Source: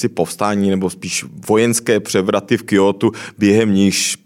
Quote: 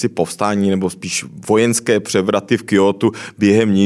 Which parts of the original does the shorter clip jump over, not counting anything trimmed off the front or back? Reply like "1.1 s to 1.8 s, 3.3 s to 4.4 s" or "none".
none